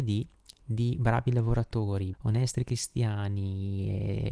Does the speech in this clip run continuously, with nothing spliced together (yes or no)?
no